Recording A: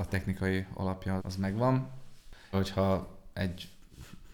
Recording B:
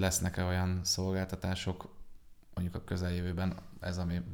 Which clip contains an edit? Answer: A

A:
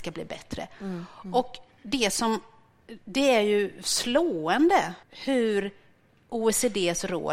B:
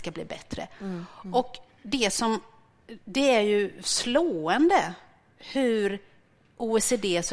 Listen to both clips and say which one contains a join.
A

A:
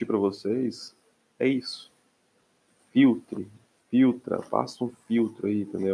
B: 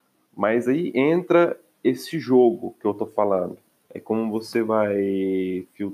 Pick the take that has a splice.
B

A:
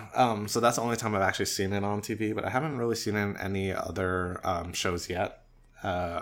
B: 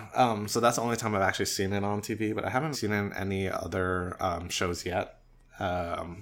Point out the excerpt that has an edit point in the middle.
B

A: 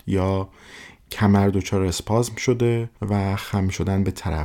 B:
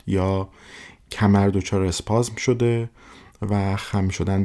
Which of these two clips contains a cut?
A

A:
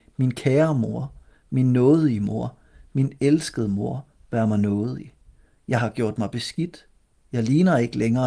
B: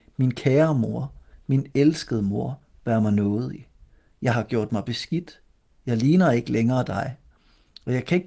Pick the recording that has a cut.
B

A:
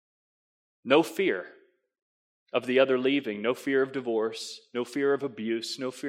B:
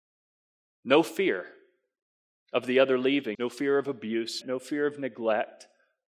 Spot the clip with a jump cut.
B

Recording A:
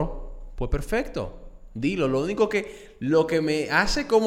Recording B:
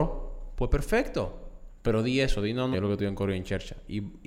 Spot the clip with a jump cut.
B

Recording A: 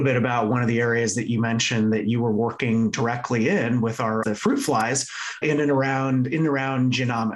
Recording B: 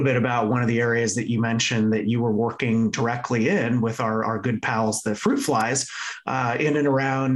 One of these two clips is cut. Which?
A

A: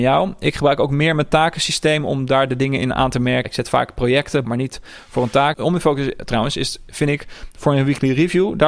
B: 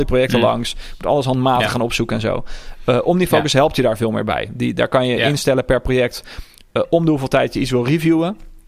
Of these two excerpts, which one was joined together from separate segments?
A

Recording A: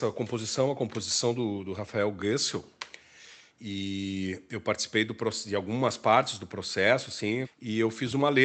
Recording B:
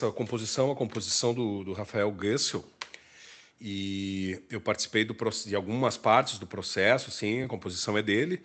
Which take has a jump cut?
A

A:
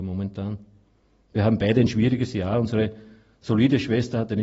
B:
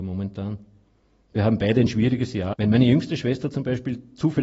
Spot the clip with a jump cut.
B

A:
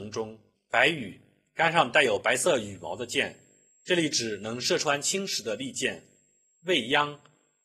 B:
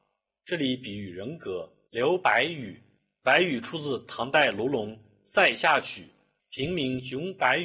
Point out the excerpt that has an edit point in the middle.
B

